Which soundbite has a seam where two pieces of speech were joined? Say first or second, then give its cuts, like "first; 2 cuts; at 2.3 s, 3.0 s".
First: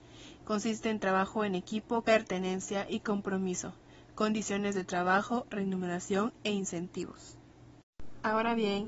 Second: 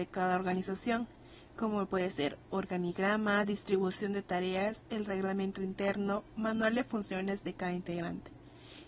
first; 1 cut; at 2.0 s